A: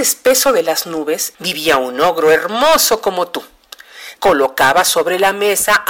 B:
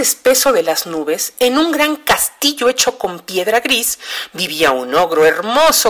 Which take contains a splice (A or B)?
A